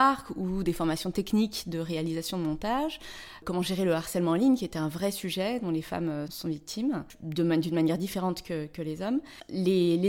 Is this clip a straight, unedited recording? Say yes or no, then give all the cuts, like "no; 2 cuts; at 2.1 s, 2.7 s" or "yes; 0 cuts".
no; 1 cut; at 6.3 s